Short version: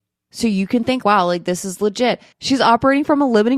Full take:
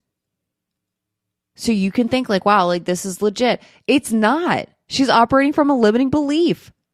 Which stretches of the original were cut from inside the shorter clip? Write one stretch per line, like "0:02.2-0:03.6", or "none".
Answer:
0:02.3-0:02.4
0:03.7-0:04.8